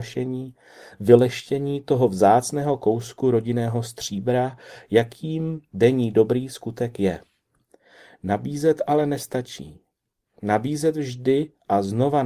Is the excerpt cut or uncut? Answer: cut